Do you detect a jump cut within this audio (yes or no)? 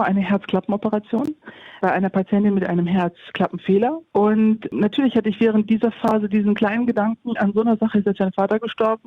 yes